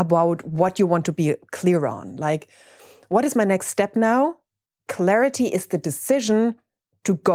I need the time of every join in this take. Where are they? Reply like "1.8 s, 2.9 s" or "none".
none

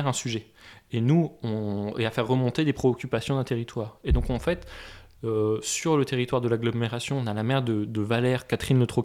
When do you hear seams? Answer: none

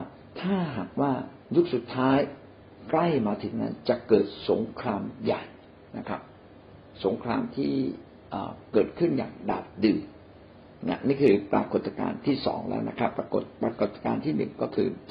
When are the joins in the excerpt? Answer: 1.4 s

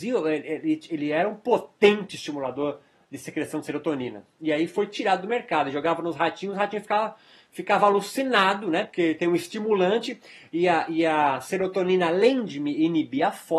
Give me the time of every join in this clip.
none

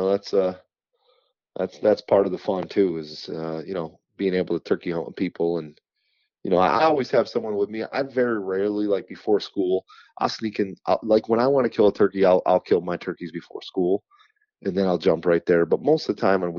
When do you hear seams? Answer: none

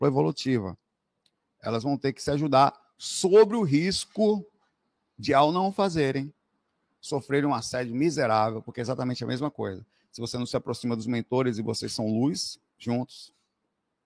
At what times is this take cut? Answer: none

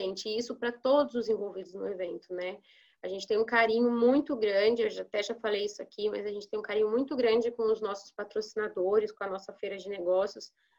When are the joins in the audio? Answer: none

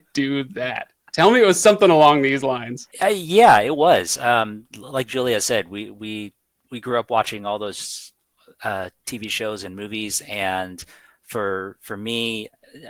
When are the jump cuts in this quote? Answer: 2.9 s

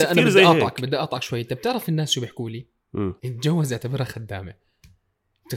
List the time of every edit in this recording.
3.2 s

